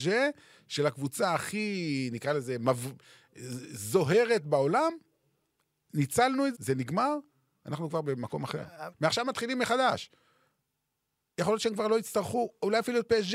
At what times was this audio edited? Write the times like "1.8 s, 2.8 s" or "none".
6.5 s, 8.9 s